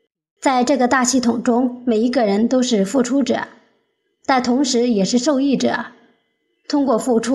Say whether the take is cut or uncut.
uncut